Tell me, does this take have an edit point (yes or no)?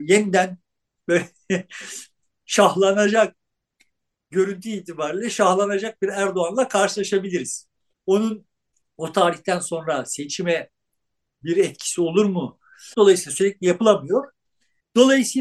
yes